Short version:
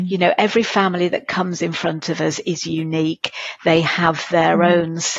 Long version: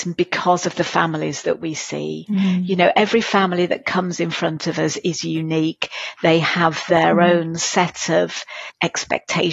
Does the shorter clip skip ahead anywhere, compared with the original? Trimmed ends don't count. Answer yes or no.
no